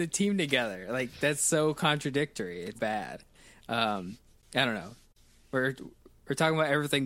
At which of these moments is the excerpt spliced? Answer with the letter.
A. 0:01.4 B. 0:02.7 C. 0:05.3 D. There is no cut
B